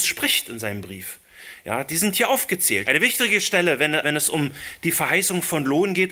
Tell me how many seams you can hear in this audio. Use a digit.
2